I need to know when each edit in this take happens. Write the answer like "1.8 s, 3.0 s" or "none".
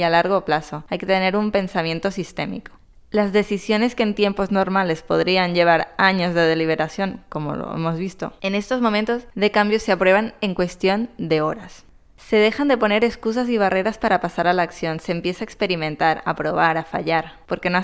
none